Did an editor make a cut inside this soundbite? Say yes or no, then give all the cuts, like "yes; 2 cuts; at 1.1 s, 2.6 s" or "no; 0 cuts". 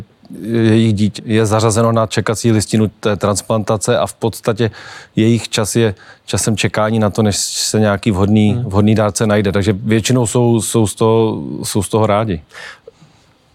yes; 1 cut; at 1.2 s